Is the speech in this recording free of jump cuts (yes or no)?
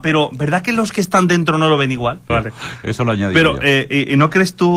no